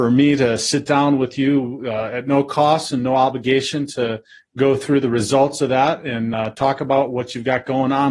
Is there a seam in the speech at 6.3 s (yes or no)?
no